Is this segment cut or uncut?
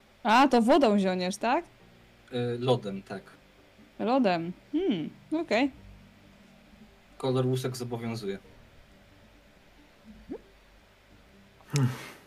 uncut